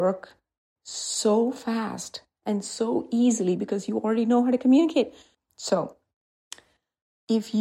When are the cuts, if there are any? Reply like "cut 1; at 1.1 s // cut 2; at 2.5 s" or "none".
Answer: cut 1; at 5.3 s